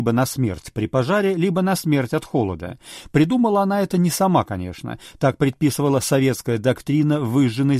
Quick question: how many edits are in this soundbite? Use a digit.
0